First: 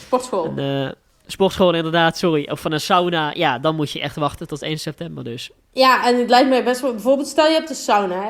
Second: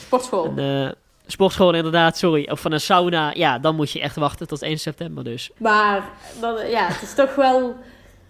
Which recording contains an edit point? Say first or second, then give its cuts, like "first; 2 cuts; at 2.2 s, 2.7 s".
second; 1 cut; at 5.6 s